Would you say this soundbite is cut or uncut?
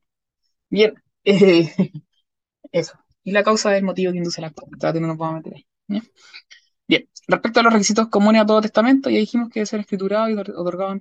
uncut